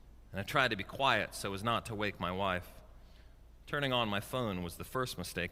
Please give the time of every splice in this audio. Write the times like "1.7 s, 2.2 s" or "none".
none